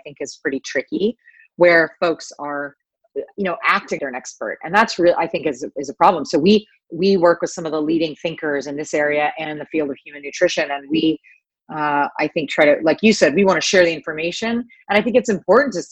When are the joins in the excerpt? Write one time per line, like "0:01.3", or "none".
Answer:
0:04.0